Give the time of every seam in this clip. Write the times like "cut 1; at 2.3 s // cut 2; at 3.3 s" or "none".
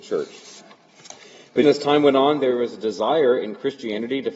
cut 1; at 1.6 s

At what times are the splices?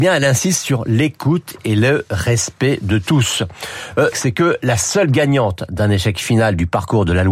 cut 1; at 4.1 s

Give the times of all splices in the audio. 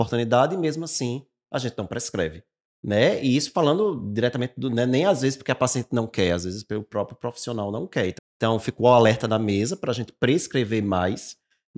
cut 1; at 8.2 s

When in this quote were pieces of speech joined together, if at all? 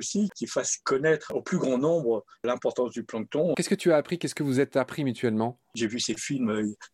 cut 1; at 3.5 s

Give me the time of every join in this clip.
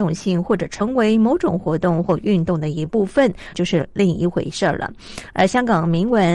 cut 1; at 3.5 s

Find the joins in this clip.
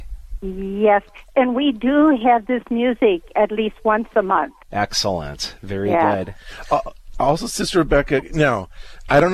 cut 1; at 4.6 s

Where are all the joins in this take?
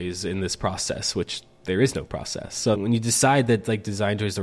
none

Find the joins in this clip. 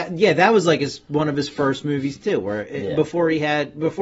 none

